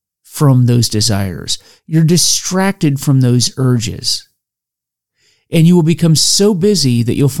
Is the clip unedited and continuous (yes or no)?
yes